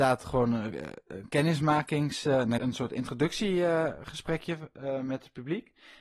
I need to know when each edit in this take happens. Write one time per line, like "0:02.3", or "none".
0:02.6